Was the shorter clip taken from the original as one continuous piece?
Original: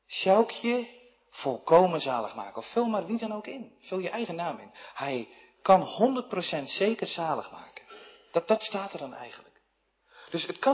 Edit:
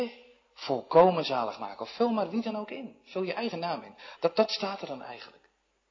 no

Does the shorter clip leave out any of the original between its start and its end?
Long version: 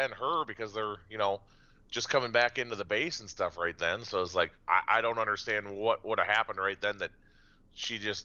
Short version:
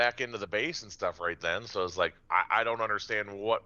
no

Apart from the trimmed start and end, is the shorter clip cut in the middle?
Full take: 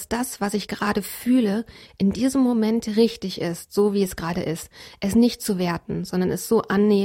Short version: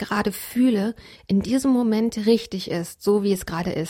no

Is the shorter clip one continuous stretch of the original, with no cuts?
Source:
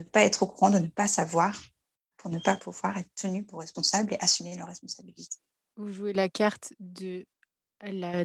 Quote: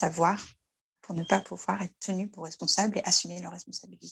yes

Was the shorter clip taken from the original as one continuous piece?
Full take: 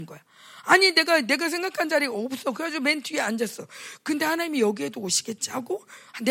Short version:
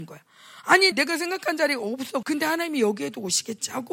no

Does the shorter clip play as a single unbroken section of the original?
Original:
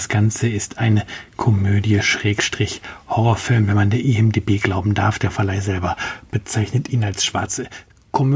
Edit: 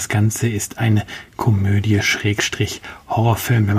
yes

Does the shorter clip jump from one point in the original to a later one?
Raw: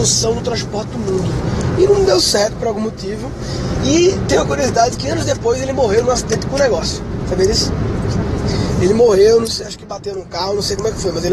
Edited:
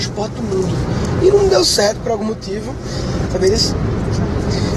yes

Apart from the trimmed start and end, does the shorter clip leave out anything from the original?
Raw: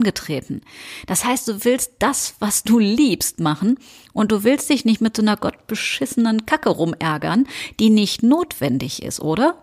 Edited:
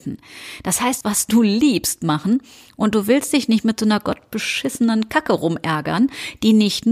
yes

